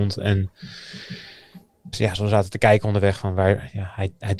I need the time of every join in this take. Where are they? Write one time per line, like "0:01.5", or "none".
0:01.9